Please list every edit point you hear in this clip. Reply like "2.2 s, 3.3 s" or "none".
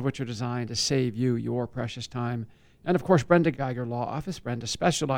3.5 s